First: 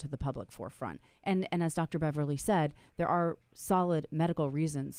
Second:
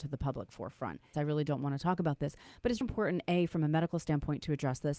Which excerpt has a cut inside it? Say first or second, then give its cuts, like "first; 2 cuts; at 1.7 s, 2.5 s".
second; 2 cuts; at 1.1 s, 2.8 s